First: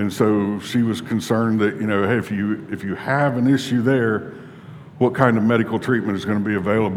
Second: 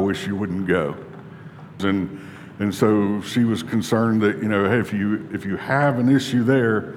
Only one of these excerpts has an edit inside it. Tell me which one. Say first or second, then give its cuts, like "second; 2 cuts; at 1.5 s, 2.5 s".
second; 1 cut; at 1.8 s